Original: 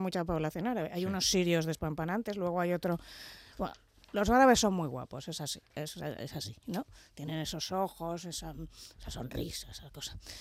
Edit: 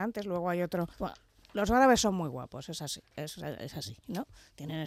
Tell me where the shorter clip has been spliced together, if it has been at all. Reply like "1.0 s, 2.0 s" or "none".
0.9 s